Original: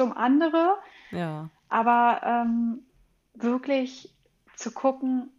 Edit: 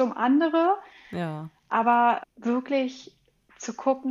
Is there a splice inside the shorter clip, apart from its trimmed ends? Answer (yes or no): yes